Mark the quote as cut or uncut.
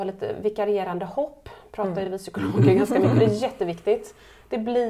uncut